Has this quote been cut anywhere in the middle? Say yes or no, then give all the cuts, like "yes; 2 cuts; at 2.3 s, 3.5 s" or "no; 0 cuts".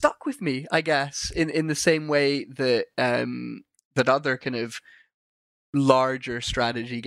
no; 0 cuts